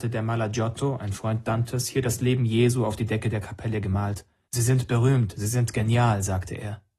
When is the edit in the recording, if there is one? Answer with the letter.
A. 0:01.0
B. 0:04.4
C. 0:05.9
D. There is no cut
B